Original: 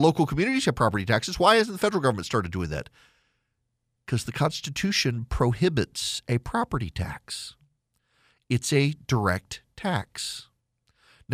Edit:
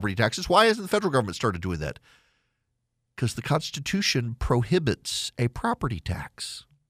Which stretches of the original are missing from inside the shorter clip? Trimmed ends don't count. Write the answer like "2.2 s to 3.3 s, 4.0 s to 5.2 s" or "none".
none